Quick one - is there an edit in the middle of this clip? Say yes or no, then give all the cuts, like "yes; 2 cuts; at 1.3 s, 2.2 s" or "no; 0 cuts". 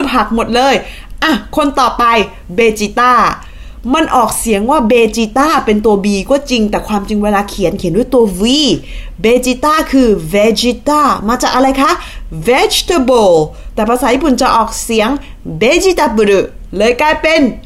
no; 0 cuts